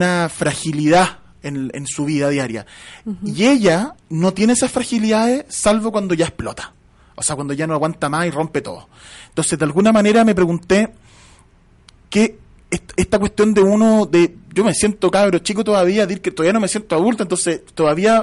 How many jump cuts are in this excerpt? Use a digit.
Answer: 1